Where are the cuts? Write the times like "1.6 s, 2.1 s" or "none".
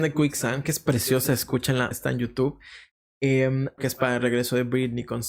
1.9 s, 3.8 s